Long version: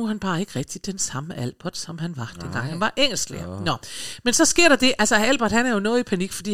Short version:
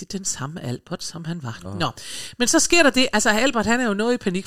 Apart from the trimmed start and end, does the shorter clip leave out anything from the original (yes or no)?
yes